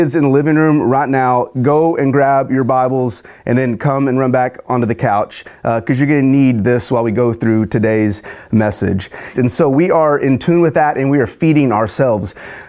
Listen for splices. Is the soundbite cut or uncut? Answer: cut